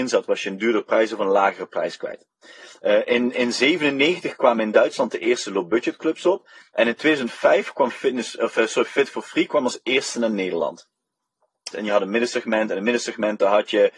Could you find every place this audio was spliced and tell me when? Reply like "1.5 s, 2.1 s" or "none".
11.7 s